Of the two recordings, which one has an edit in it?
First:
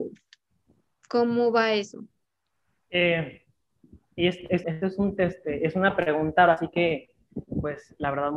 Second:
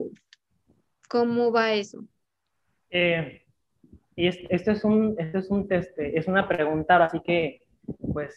first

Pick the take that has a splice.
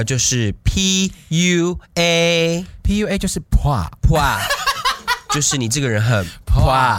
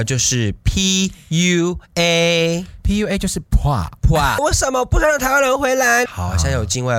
second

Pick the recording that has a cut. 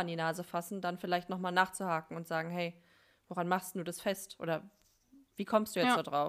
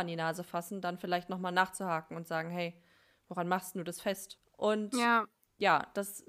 second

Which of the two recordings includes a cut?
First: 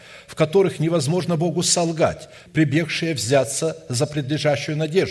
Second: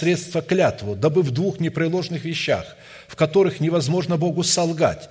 first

